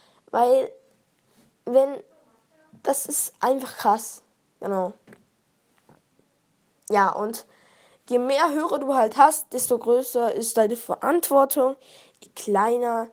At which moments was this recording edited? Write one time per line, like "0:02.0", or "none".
none